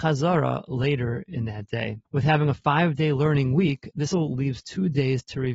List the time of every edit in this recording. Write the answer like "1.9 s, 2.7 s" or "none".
2.1 s, 4.1 s